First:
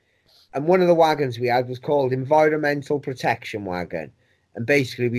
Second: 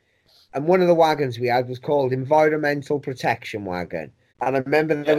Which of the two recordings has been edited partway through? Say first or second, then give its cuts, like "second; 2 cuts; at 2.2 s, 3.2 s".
second; 1 cut; at 4.3 s